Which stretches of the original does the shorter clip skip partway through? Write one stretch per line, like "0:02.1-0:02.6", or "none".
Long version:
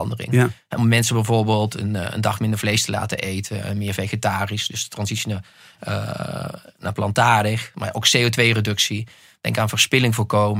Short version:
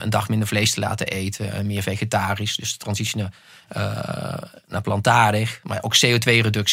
none